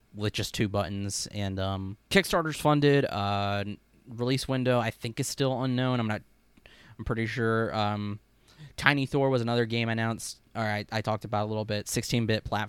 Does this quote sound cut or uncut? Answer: cut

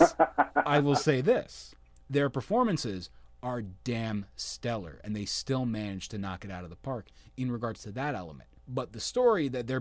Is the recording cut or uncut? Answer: cut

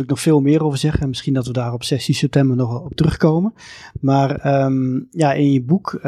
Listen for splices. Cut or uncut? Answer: uncut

